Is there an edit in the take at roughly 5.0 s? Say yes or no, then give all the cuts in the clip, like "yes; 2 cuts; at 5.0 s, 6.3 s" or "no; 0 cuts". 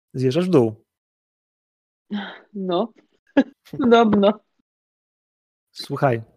no; 1 cut; at 3.5 s